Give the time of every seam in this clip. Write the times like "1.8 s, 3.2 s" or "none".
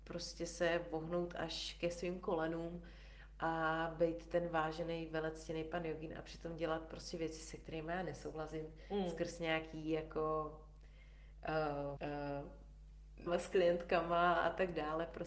12.0 s, 13.3 s